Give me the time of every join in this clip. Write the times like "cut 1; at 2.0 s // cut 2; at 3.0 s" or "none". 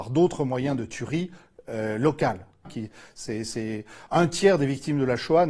cut 1; at 2.6 s